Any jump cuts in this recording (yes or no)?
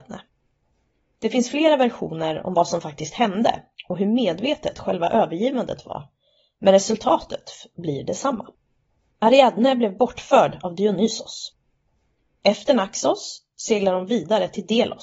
no